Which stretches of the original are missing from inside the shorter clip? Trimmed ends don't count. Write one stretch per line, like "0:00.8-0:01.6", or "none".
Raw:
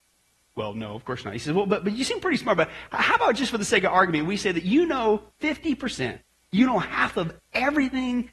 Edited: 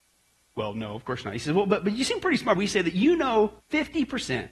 0:02.6-0:04.3